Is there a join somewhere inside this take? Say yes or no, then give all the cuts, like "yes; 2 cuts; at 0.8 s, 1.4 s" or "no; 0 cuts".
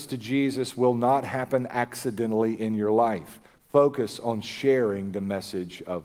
yes; 1 cut; at 3.5 s